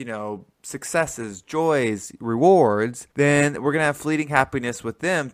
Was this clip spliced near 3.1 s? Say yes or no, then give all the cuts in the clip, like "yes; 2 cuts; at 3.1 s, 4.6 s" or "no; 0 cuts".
yes; 1 cut; at 3.1 s